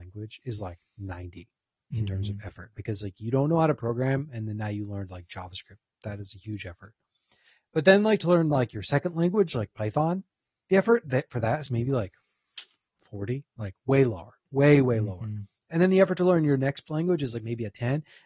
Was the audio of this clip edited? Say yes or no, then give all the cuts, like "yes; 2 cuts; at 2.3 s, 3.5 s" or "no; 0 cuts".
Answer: no; 0 cuts